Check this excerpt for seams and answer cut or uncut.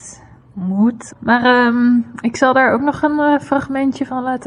cut